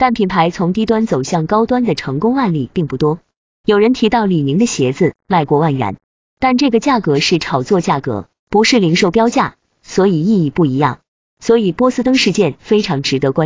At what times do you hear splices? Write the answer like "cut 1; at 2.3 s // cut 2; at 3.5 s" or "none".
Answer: none